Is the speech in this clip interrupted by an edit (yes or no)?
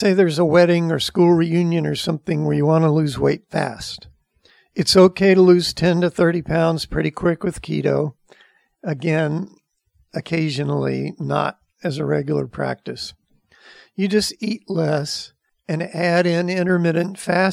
no